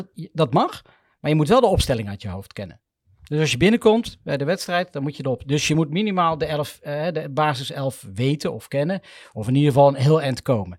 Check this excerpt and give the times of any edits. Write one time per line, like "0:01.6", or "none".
none